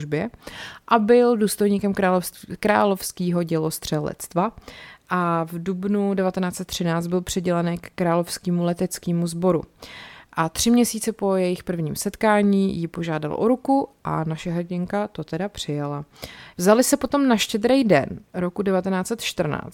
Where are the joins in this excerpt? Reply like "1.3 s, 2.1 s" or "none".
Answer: 16.5 s